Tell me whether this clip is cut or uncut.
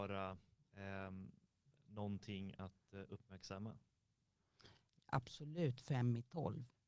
cut